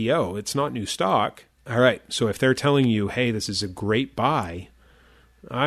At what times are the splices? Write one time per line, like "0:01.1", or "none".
0:01.6